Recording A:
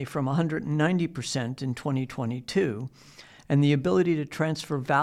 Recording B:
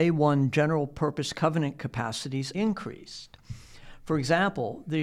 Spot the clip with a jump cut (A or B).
B